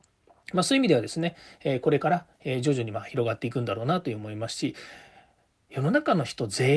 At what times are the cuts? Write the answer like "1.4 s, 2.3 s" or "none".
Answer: none